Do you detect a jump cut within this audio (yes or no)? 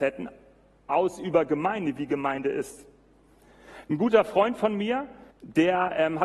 yes